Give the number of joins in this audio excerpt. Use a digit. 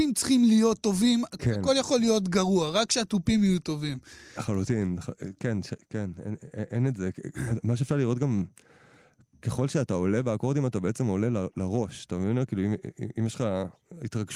1